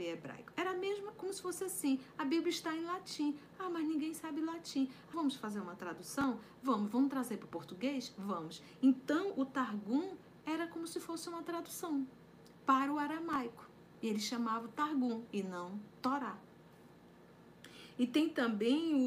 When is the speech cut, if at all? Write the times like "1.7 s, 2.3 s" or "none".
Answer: 5.1 s